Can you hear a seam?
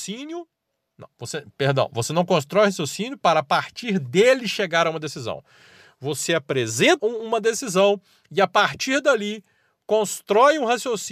yes; 1 cut; at 7.0 s

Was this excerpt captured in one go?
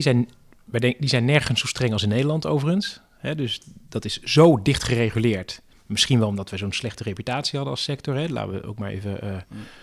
yes; 0 cuts

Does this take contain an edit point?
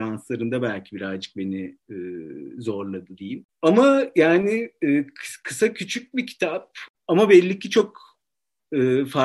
no; 0 cuts

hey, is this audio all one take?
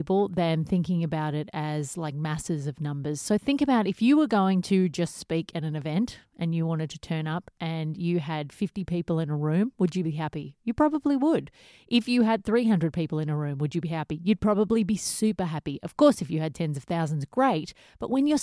yes; 0 cuts

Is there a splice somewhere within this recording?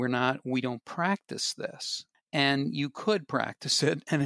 no; 0 cuts

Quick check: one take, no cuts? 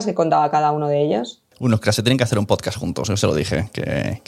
no; 1 cut; at 1.5 s

